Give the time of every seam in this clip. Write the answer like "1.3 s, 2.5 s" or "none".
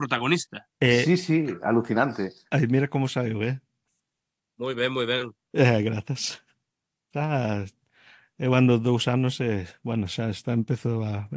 5.4 s